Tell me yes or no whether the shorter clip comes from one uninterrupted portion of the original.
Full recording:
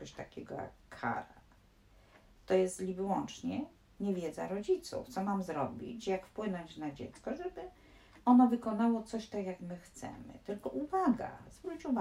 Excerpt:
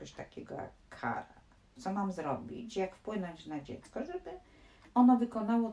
no